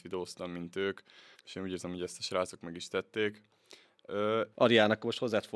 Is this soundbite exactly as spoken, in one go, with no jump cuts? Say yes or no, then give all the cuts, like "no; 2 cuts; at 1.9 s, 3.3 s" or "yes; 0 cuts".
no; 2 cuts; at 1.3 s, 4.5 s